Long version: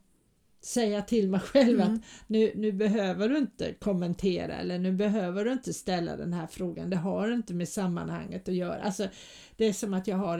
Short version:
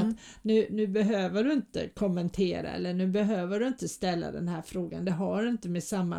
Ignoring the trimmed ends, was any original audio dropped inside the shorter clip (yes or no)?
no